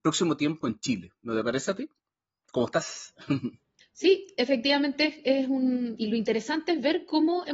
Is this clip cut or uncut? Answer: cut